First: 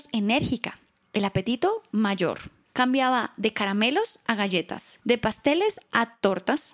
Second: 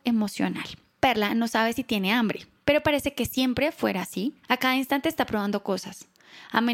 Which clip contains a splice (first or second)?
first